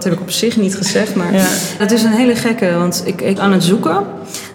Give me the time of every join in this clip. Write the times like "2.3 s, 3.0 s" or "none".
1.8 s, 3.4 s